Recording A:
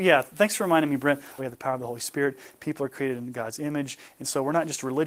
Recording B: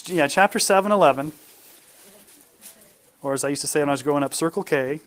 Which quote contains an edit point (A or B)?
A